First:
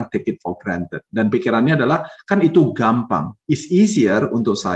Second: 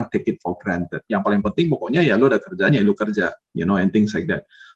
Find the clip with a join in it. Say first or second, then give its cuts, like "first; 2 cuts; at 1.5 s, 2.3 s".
second; 1 cut; at 1.1 s